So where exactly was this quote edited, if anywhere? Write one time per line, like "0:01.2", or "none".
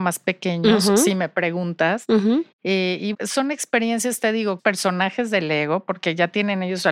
0:03.1
0:04.6